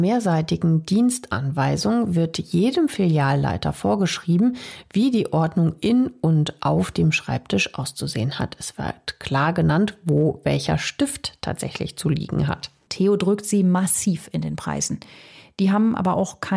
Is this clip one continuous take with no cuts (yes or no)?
no